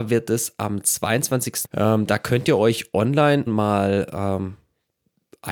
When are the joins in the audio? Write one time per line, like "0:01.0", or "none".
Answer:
0:01.6
0:03.5